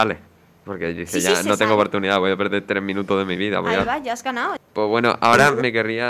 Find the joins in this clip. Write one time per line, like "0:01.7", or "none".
0:04.6